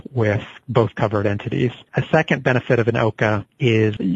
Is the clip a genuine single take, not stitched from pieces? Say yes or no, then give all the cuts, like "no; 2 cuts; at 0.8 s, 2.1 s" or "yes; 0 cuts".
yes; 0 cuts